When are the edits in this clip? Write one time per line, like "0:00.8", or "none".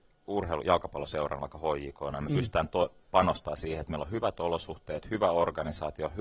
none